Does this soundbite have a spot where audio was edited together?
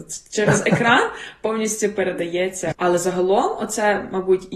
yes; 1 cut; at 2.7 s

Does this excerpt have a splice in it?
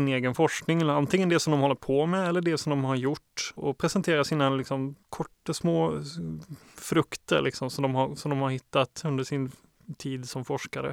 yes; 2 cuts; at 3.6 s, 5.0 s

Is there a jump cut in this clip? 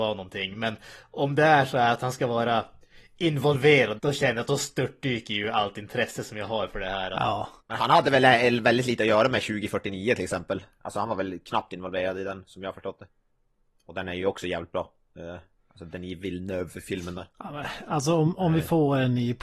yes; 2 cuts; at 4.0 s, 7.6 s

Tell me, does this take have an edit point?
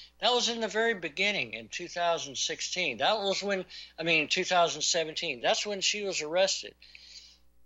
no; 0 cuts

